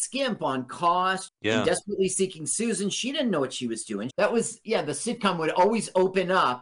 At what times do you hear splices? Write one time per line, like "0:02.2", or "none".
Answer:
0:01.3
0:04.1